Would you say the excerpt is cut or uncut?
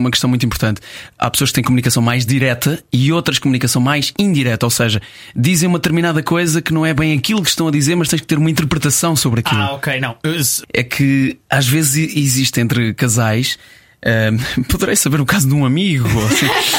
cut